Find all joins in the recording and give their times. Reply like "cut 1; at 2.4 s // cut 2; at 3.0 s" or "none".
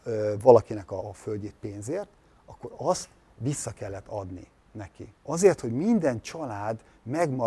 cut 1; at 1.0 s // cut 2; at 5.2 s